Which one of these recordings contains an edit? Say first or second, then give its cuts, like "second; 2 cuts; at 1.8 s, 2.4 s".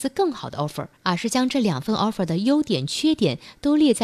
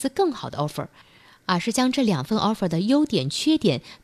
first; 1 cut; at 0.9 s